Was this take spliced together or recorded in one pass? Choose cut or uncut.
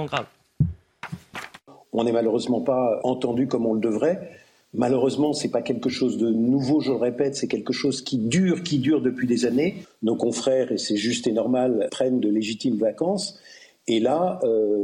cut